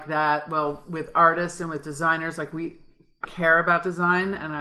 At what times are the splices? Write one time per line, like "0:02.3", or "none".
0:03.2